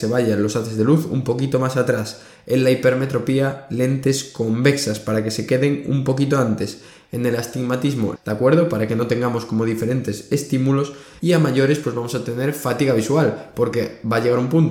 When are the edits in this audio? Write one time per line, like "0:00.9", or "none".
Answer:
0:08.2
0:11.2